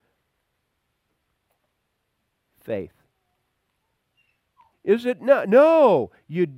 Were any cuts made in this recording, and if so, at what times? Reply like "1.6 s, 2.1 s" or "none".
4.7 s